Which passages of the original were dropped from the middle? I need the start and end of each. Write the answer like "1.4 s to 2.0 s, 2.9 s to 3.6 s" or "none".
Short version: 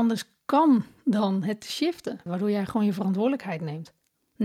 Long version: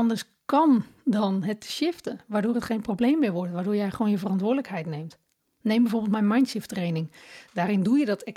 2.3 s to 3.5 s